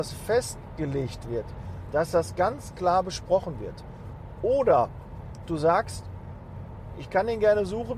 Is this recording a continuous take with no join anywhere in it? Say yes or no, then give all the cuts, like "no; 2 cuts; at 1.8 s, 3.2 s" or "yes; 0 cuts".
yes; 0 cuts